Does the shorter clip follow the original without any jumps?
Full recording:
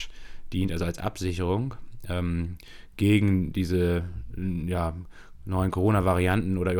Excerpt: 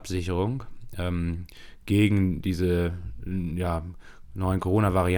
yes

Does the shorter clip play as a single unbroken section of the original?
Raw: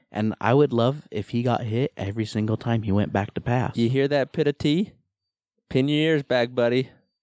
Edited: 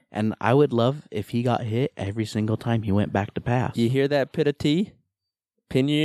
yes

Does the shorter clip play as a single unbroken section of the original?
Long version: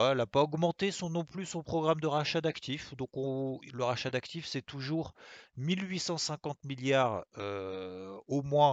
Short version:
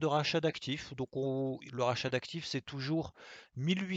yes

